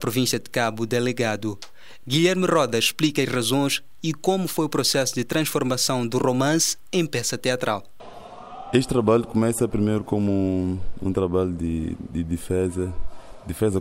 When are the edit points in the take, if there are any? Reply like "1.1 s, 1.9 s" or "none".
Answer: none